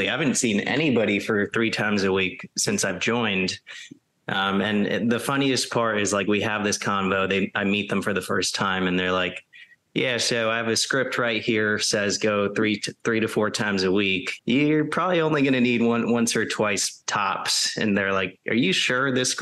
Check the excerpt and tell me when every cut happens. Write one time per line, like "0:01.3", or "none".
0:14.4

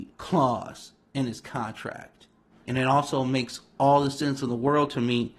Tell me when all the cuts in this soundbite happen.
0:02.5

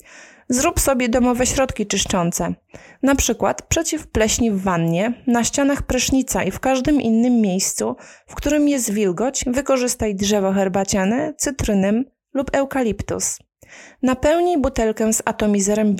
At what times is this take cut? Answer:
none

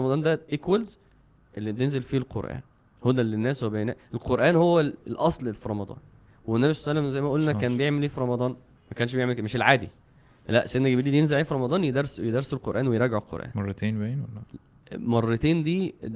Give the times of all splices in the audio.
0:08.8

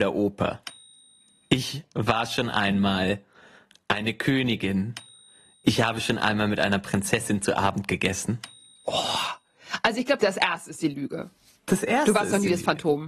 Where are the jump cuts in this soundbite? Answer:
0:10.2

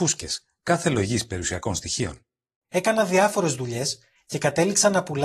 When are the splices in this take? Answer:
0:02.6

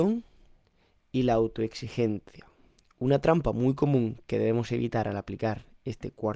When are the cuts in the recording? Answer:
none

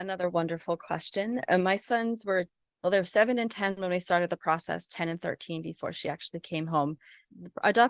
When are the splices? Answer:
none

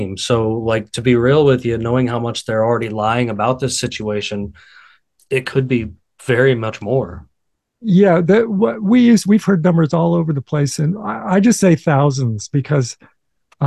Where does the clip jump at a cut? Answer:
none

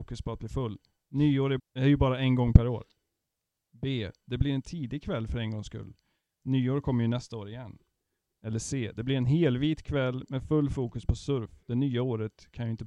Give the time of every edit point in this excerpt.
0:01.6

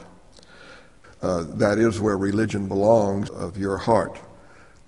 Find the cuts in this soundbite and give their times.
0:01.0
0:03.3

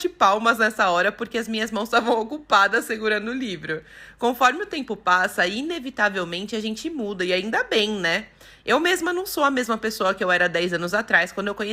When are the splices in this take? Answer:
none

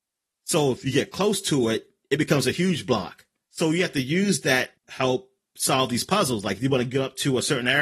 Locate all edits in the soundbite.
0:03.5
0:04.8

